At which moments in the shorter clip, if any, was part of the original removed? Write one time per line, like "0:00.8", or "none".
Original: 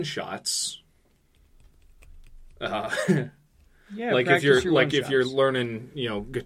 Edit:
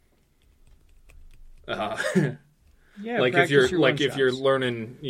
none